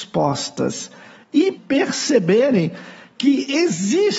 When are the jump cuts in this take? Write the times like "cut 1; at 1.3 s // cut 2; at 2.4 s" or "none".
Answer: cut 1; at 1.5 s